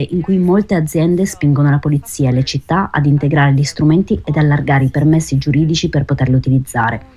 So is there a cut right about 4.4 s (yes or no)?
no